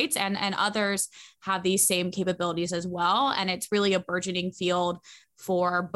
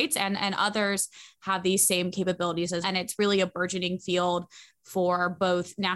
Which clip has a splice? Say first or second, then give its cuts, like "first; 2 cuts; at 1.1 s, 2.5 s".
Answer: second; 1 cut; at 2.8 s